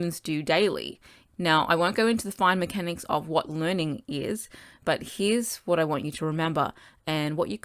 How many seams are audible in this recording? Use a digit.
1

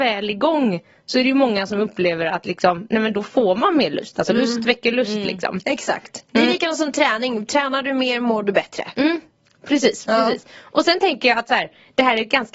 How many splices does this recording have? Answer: 0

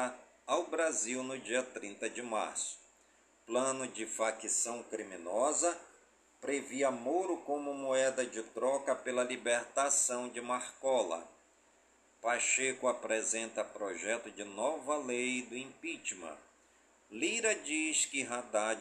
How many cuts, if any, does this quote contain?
0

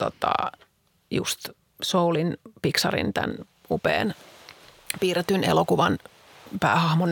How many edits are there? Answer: 1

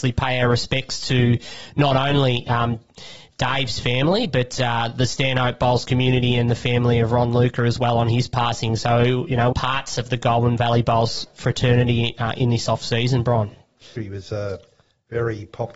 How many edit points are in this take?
2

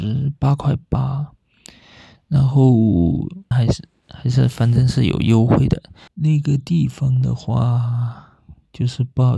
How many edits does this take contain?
2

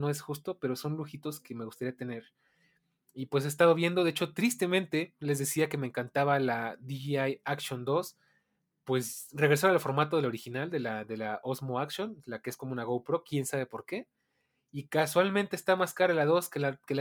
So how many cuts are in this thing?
0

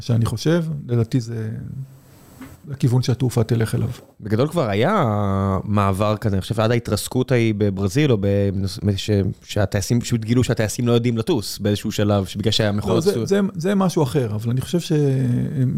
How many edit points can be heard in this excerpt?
0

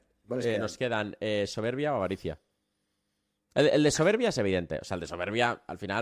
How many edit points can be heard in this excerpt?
0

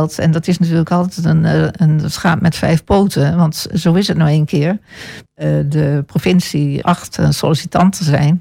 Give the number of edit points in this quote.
2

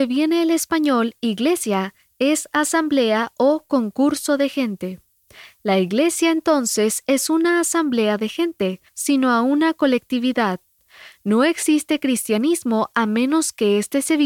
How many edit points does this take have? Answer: 1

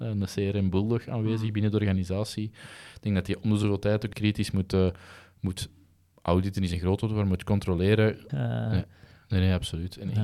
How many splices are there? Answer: 2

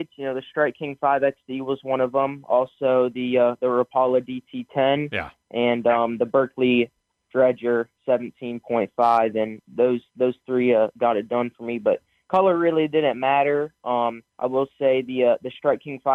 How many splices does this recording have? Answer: 1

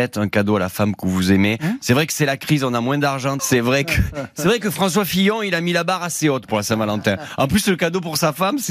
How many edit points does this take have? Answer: 1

